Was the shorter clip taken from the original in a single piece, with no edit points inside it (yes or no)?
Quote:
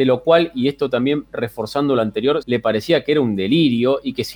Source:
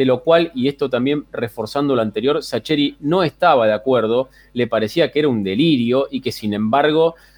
no